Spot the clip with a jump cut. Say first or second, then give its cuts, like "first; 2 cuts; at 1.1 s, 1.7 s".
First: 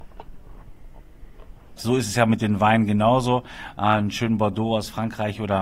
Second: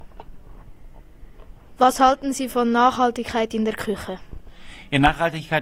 first; 1 cut; at 1.8 s